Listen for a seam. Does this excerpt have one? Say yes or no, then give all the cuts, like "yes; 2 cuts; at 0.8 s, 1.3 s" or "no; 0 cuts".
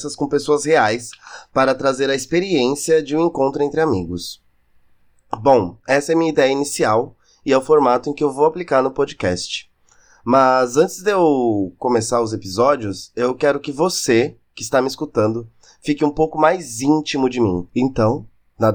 no; 0 cuts